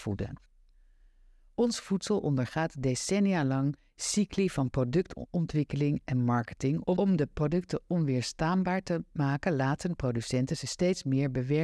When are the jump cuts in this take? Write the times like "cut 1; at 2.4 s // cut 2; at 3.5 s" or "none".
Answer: none